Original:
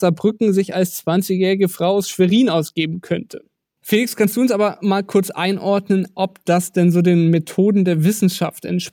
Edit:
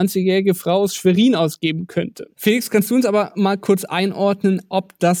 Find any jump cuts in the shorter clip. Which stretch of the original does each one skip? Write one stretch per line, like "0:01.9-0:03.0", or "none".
0:03.5-0:03.8